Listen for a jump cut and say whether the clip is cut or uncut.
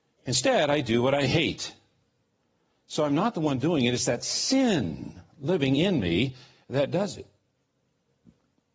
cut